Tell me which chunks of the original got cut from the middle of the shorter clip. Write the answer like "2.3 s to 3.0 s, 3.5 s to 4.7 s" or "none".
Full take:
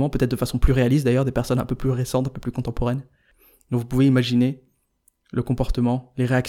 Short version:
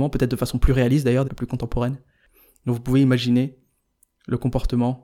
1.2 s to 2.3 s